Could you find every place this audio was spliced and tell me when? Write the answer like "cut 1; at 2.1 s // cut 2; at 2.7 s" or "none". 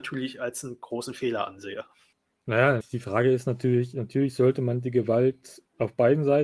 cut 1; at 2.8 s

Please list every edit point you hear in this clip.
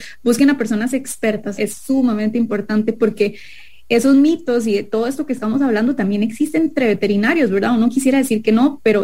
cut 1; at 1.6 s

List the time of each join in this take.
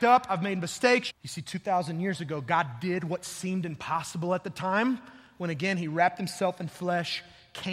cut 1; at 1.1 s

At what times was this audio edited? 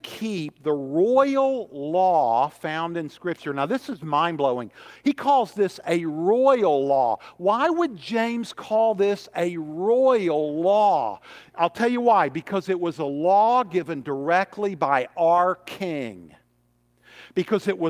none

